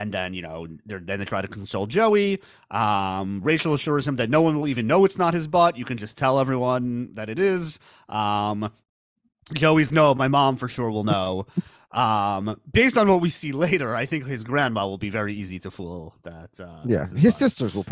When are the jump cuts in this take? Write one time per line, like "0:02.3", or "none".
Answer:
0:09.9